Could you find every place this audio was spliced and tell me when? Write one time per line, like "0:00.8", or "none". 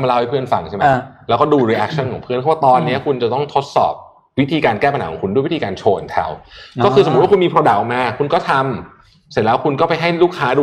none